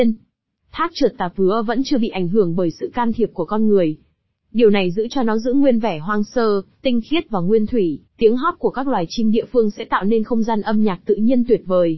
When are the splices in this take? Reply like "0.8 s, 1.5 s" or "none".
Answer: 8.1 s

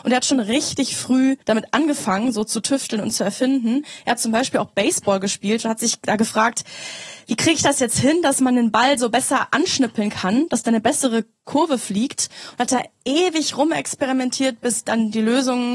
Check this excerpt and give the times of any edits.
1.4 s

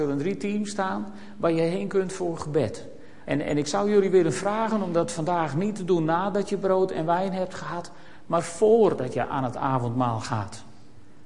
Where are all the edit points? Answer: 3.3 s

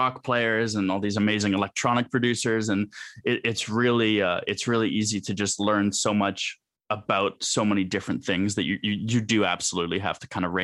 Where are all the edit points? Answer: none

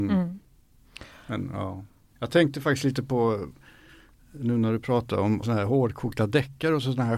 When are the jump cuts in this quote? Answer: 2.2 s, 5.4 s

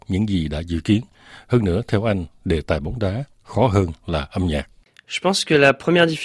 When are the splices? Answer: none

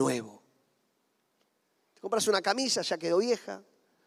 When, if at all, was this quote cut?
1.9 s

